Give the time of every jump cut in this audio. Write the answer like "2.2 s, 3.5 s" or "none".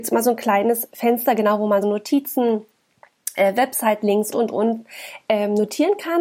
1.8 s, 4.3 s

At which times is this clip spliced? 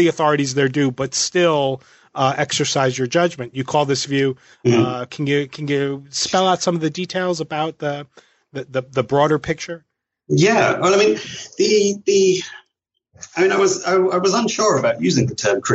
5.1 s

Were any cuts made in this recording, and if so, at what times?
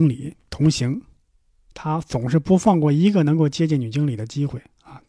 none

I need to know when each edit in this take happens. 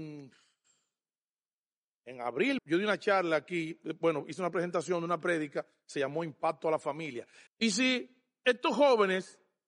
2.6 s, 7.5 s

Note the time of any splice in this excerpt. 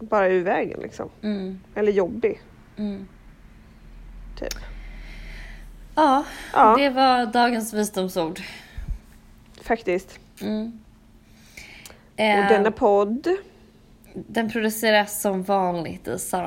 none

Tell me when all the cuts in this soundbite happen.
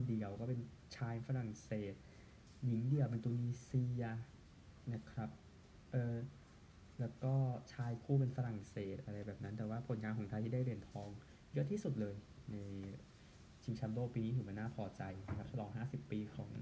none

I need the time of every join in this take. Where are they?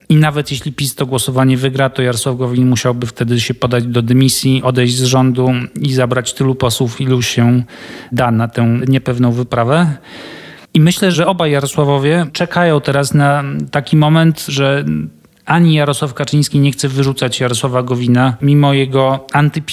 10.6 s, 18.4 s

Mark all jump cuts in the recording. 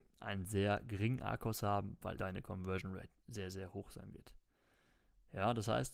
2.2 s

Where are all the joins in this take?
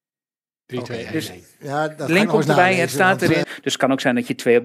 3.4 s

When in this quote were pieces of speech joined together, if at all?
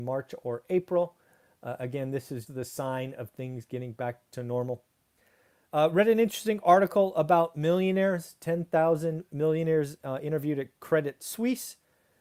2.5 s

